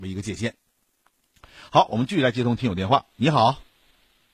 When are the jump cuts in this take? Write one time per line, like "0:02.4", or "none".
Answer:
none